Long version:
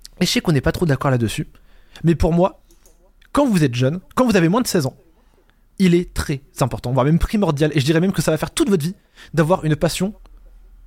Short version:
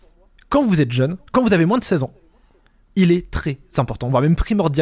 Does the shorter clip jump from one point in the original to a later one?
no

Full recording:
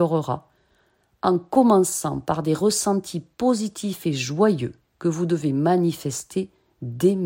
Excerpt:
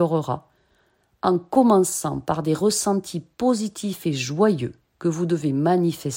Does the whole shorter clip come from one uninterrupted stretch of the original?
yes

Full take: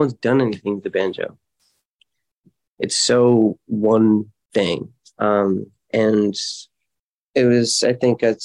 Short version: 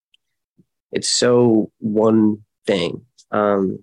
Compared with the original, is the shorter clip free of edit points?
yes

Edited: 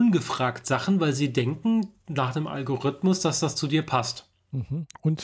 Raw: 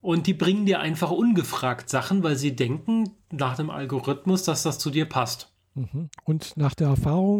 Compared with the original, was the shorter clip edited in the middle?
no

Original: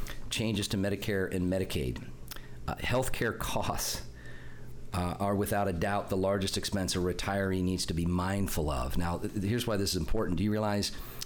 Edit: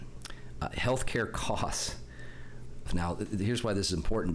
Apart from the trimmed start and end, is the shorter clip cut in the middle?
yes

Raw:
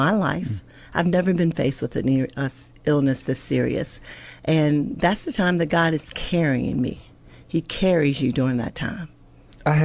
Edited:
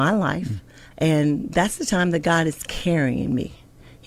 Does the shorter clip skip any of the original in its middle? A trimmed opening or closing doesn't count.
yes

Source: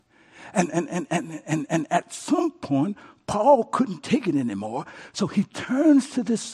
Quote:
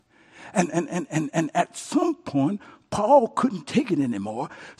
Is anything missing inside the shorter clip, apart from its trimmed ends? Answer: yes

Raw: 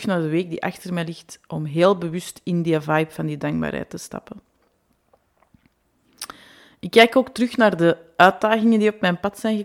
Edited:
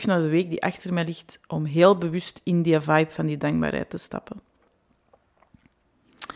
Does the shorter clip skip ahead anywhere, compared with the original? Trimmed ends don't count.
no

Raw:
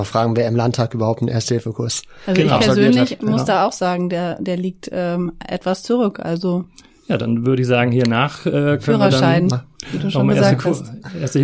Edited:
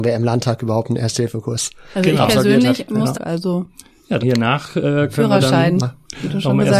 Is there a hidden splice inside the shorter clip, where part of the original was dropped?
yes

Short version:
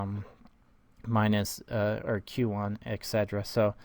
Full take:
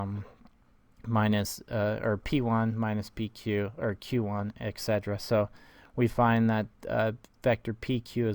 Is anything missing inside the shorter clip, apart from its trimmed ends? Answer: yes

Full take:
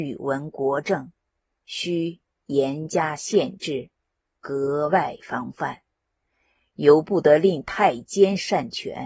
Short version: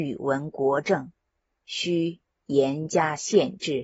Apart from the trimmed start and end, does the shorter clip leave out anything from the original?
no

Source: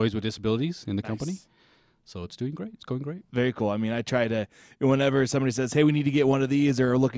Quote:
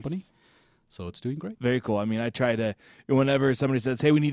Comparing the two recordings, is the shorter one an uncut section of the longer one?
no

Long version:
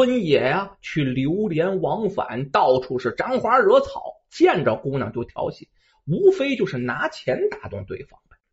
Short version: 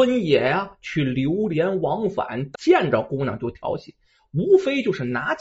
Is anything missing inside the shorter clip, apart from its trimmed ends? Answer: yes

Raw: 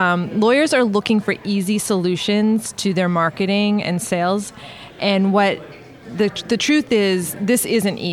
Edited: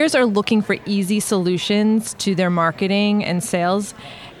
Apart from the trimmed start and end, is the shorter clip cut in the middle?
no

